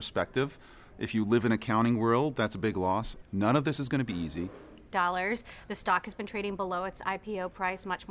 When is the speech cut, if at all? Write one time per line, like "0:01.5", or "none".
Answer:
0:03.2
0:04.9